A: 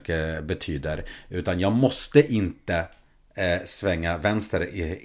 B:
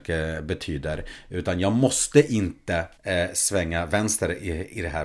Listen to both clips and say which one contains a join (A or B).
B